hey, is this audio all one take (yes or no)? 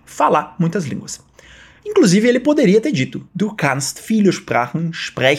yes